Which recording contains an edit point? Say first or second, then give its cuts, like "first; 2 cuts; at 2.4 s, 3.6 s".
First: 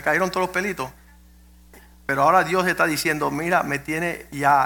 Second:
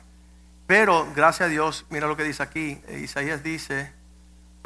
second; 1 cut; at 2.8 s